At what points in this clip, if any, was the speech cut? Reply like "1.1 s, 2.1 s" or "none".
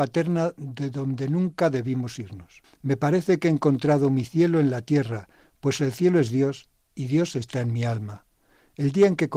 none

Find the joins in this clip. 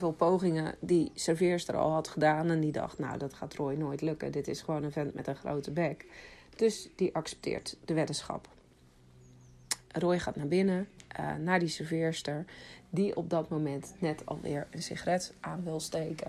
none

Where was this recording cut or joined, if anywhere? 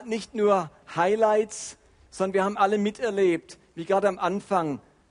none

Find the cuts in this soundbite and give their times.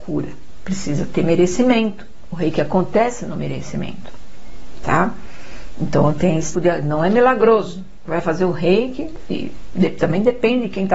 6.5 s

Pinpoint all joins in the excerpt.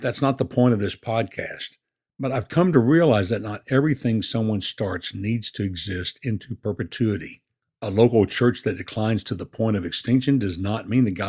2.1 s

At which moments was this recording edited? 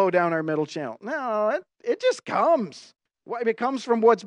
none

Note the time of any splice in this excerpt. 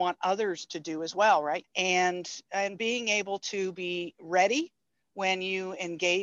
1.6 s

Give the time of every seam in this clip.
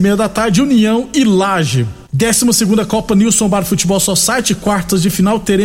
2.1 s

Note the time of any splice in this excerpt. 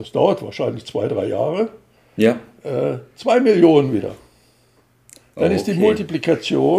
none

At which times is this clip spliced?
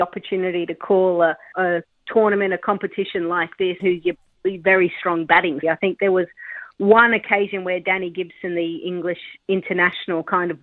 1.5 s, 3.8 s, 5.6 s

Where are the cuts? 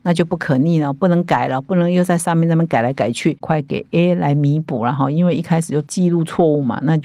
3.4 s

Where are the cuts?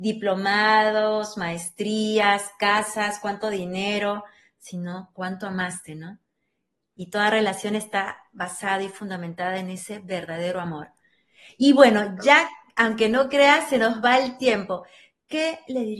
none

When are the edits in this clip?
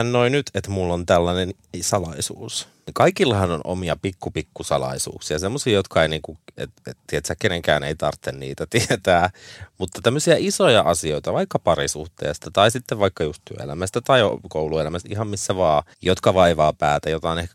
15.9 s

